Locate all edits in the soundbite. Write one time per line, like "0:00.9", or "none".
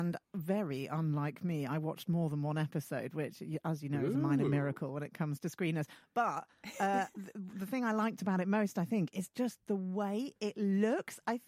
none

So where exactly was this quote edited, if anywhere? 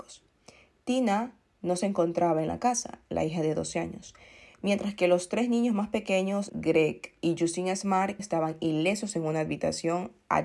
0:06.5
0:08.2

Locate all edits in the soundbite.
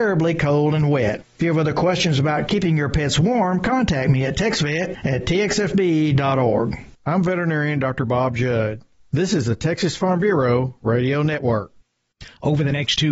0:06.9

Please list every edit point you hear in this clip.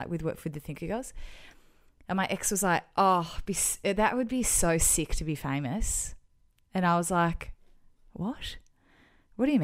none

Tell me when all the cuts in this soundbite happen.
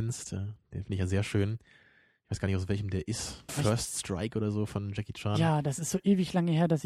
0:03.5

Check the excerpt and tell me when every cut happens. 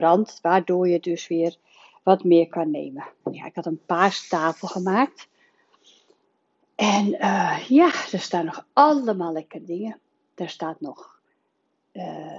0:03.2

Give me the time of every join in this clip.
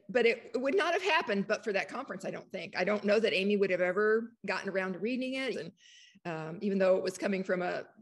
0:05.5

